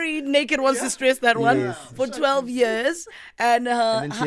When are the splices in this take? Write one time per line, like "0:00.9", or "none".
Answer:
none

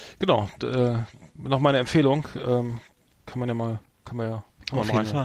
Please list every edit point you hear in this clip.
none

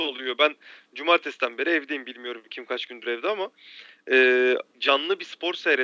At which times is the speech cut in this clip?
0:04.7

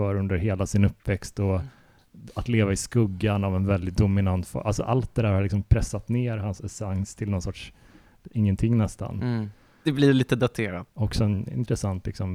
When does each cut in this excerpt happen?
0:09.9
0:10.9

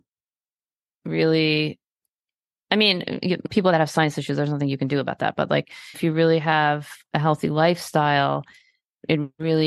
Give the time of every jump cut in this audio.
0:03.2

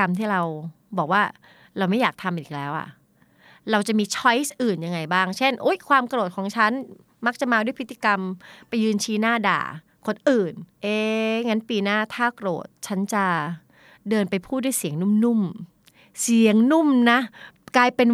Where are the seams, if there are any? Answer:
0:10.7

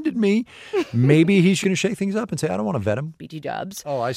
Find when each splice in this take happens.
0:01.6
0:03.2

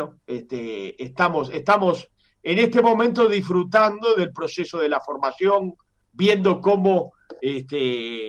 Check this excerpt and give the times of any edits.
none

